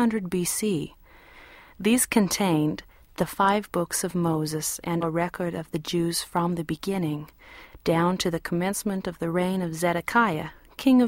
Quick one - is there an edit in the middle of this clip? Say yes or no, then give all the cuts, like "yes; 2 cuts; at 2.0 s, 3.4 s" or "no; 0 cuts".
yes; 1 cut; at 5.0 s